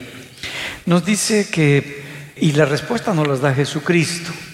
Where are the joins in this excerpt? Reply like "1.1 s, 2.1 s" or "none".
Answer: 2.4 s

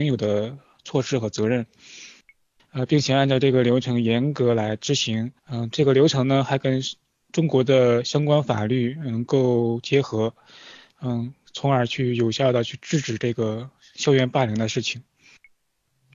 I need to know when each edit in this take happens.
2.6 s, 5.4 s

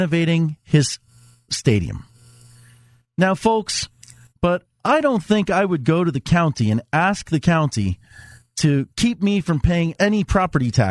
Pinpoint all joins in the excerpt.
4.3 s, 8.9 s

